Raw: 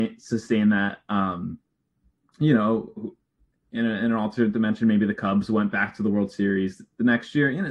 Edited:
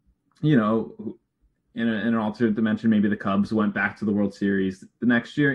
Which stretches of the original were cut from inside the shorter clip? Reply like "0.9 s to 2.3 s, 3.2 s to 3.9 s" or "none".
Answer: none